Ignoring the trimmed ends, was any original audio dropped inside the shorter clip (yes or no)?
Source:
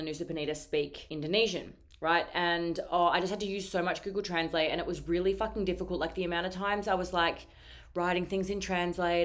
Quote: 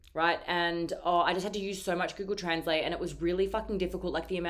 no